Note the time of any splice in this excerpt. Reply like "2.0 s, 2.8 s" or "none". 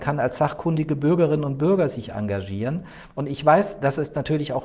none